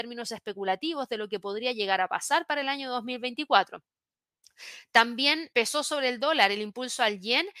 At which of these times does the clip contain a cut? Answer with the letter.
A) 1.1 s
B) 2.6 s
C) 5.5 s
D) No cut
C